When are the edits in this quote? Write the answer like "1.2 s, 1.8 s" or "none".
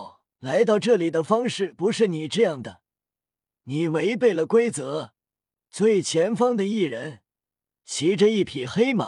5.5 s

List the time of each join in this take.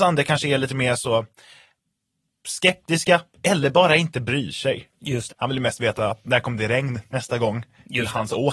5.3 s

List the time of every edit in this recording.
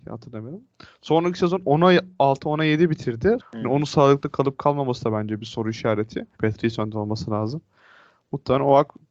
3.4 s, 6.3 s

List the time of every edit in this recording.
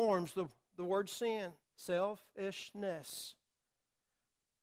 1.6 s

